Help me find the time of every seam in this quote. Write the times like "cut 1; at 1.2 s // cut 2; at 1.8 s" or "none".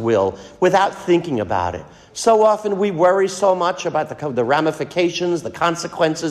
none